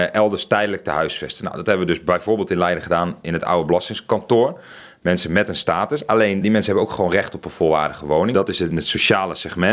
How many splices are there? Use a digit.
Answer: 2